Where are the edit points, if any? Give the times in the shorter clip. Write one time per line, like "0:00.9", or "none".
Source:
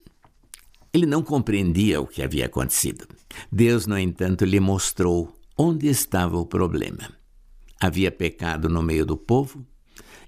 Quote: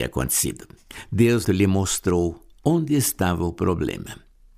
0:01.4